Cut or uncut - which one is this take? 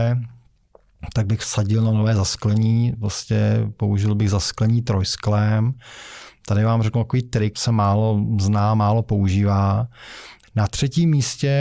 cut